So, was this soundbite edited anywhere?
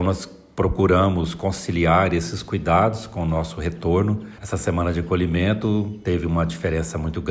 yes; 1 cut; at 4.4 s

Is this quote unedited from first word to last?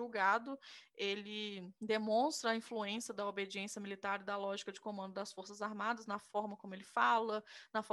no; 1 cut; at 1.8 s

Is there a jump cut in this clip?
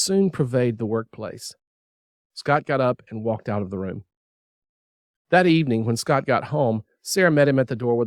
yes; 1 cut; at 2.2 s

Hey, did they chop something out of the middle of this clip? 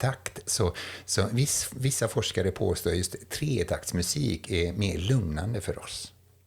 no; 0 cuts

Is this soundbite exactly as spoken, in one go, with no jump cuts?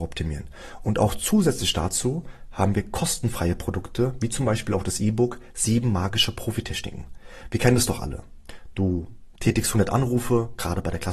yes; 0 cuts

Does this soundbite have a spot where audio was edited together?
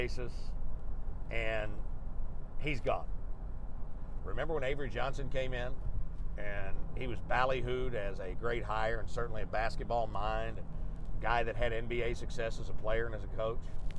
yes; 2 cuts; at 4.2 s, 8.3 s

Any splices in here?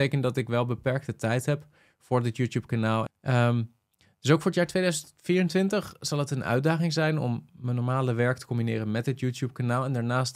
yes; 1 cut; at 3.1 s

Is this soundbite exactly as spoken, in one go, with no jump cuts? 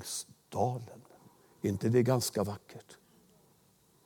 yes; 0 cuts

